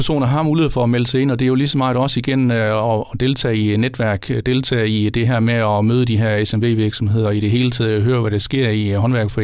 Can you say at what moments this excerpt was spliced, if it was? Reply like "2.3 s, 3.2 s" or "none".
none